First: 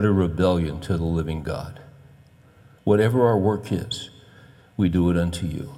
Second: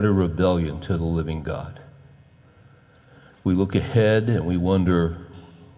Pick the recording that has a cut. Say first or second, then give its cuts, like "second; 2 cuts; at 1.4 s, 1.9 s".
first; 1 cut; at 2.8 s